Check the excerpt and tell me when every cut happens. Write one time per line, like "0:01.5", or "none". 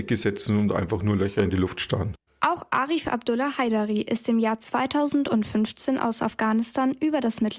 none